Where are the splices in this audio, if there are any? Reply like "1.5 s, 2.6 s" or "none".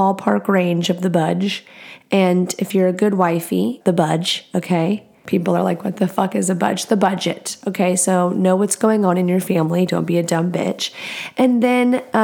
3.8 s

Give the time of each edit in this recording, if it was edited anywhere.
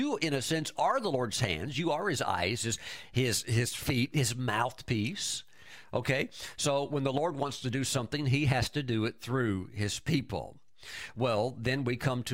none

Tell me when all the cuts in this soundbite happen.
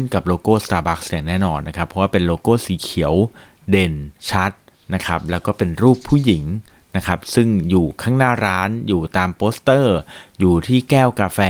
4.2 s

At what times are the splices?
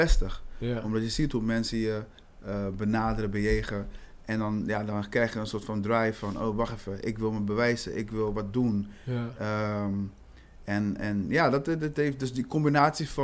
none

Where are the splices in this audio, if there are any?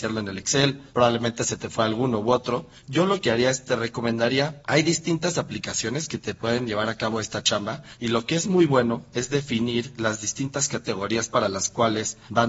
none

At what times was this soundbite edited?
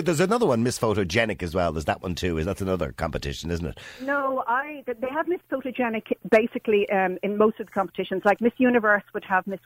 none

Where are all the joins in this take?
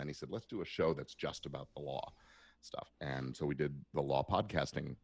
2.9 s

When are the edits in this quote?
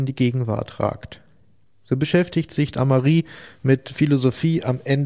none

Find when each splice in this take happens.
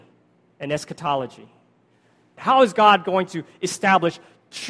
2.4 s

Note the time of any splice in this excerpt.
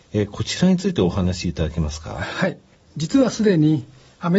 none

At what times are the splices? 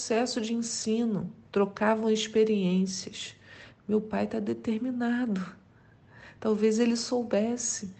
1.4 s, 3.7 s

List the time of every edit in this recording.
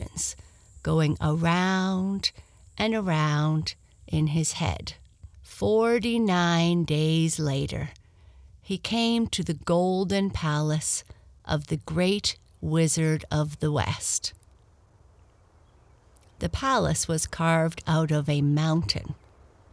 5.3 s

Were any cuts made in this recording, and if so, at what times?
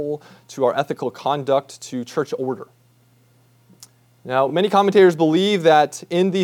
none

